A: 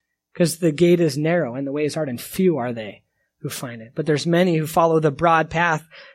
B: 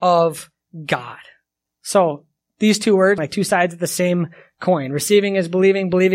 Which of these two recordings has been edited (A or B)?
B